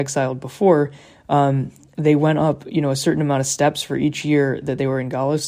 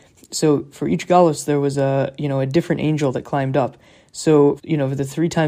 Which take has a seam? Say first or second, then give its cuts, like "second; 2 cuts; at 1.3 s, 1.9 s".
second; 1 cut; at 4.6 s